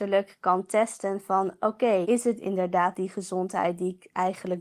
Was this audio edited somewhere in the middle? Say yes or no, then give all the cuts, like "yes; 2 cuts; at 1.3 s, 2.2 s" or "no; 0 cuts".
yes; 1 cut; at 2.0 s